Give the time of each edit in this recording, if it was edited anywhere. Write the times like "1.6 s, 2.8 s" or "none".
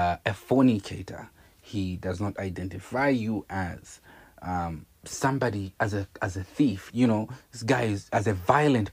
6.9 s